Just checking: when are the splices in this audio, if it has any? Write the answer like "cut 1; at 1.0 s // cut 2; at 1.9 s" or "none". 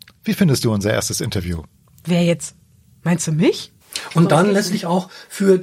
cut 1; at 3.8 s